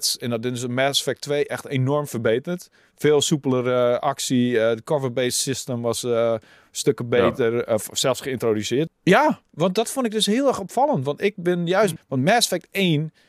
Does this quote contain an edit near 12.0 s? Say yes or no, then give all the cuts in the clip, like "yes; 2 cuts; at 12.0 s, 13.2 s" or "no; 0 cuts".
yes; 2 cuts; at 8.9 s, 12.0 s